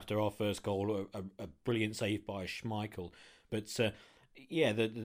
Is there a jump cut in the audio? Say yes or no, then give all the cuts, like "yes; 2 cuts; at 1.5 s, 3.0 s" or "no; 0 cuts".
yes; 1 cut; at 3.5 s